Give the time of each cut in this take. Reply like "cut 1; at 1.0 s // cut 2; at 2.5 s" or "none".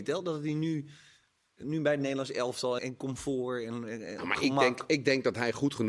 cut 1; at 2.8 s